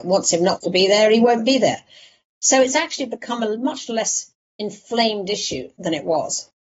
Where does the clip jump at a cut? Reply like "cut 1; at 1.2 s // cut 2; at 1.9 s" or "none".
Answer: none